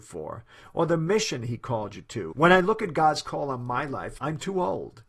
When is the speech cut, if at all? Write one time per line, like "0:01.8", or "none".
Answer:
0:02.3
0:04.2